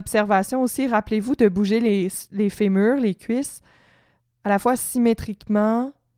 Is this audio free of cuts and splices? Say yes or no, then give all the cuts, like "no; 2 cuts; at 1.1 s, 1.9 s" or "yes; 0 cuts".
yes; 0 cuts